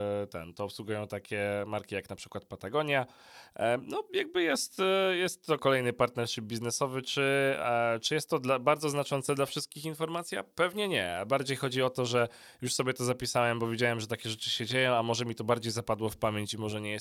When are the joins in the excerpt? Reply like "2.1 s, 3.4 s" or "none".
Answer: 5.6 s